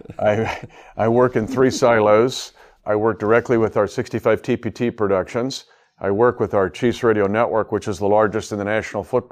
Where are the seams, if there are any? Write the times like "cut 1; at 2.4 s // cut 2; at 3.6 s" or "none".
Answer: none